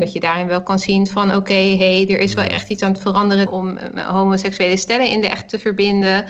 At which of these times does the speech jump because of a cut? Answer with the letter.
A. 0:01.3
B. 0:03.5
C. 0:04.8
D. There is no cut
B